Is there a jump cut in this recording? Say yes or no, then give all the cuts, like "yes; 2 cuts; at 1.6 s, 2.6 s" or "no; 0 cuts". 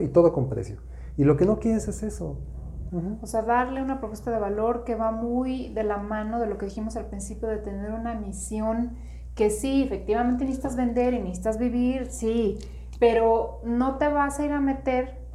yes; 1 cut; at 2.9 s